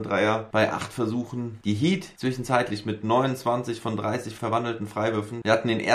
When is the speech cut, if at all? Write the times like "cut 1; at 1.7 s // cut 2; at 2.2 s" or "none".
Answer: none